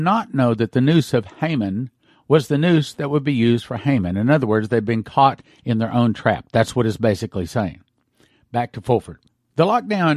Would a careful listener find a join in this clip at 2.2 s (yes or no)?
yes